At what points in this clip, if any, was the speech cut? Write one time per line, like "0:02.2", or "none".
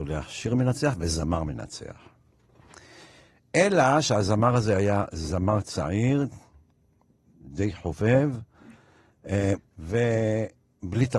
0:09.6